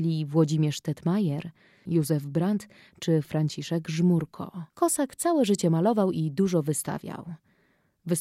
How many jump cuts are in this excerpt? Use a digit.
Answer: 2